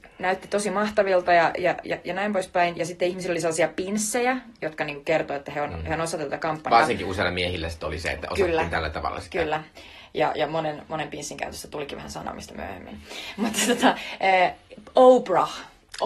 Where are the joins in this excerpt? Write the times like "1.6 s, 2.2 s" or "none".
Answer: none